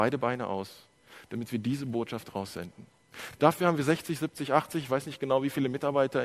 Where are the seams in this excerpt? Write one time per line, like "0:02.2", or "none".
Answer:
none

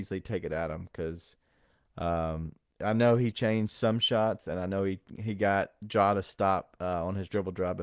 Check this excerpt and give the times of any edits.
none

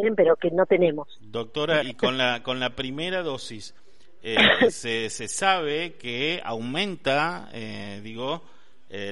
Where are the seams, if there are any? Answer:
0:01.8

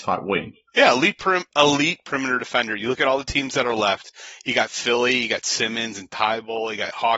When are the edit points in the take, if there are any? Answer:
none

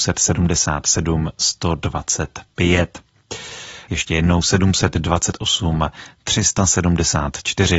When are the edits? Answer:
0:03.9

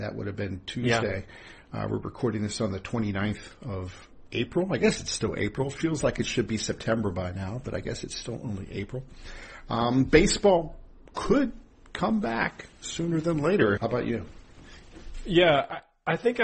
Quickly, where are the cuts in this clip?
0:13.8

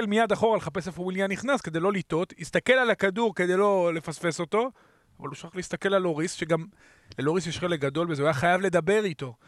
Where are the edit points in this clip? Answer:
none

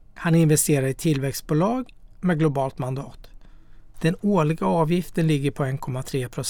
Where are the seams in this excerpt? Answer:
0:03.9

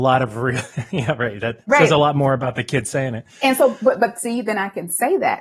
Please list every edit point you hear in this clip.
none

